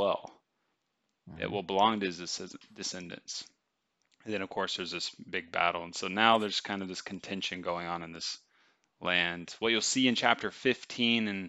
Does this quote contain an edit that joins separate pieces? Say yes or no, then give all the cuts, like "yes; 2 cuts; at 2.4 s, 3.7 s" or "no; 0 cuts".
yes; 1 cut; at 4.1 s